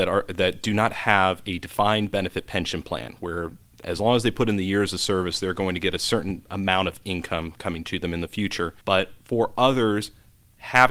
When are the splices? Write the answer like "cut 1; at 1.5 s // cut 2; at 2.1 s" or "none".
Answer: cut 1; at 8.8 s